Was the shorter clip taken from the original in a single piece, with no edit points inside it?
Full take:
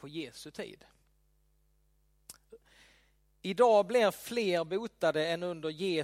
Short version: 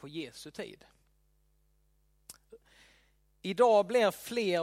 yes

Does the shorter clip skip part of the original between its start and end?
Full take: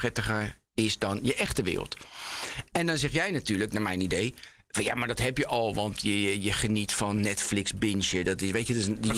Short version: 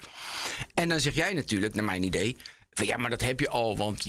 no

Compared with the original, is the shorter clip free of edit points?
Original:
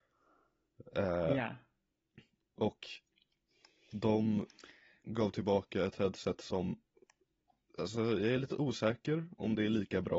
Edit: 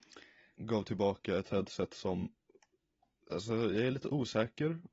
yes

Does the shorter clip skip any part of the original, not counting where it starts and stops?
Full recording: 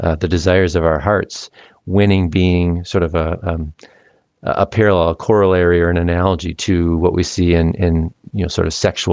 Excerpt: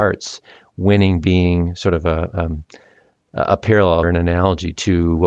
yes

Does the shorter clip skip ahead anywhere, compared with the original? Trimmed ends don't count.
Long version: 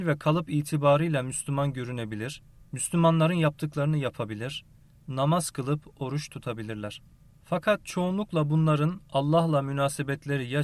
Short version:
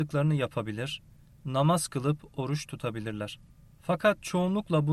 no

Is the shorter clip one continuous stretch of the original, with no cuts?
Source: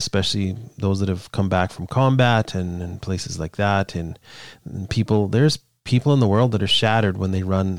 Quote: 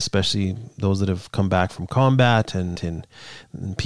no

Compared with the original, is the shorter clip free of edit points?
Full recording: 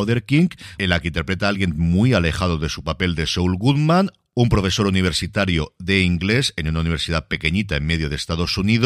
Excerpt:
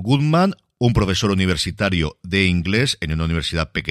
yes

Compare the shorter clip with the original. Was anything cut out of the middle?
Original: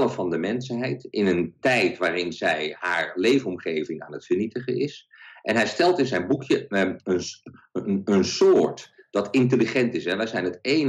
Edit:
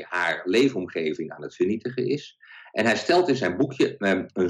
no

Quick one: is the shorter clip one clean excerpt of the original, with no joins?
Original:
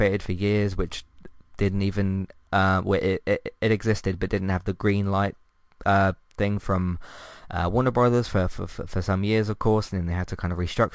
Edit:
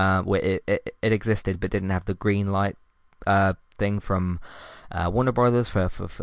yes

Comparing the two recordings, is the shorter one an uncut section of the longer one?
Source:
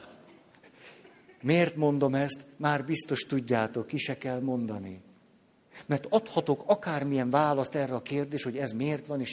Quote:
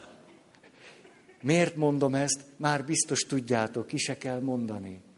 yes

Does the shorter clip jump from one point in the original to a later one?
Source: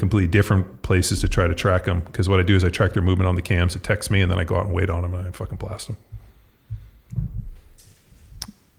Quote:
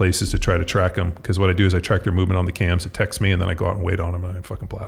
no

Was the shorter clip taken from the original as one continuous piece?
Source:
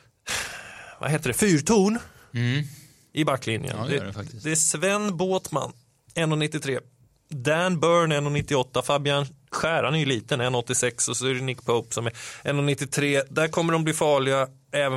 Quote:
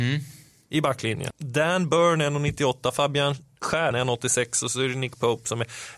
no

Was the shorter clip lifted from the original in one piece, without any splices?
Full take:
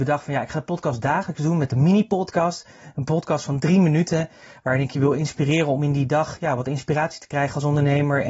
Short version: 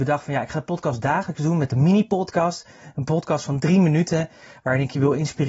yes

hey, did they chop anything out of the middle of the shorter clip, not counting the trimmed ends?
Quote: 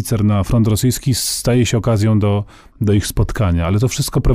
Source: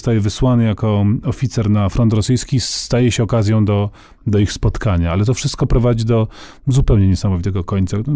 no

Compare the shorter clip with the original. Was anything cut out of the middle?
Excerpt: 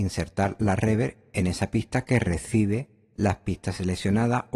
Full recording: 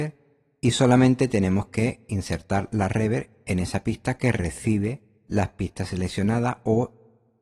no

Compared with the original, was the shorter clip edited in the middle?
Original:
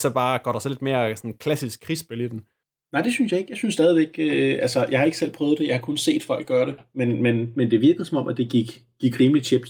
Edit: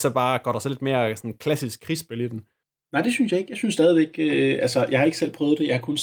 no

